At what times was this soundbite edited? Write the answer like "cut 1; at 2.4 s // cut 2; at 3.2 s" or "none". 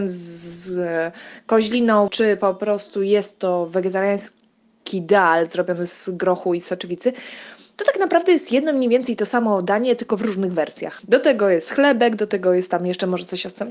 cut 1; at 2.1 s // cut 2; at 11.0 s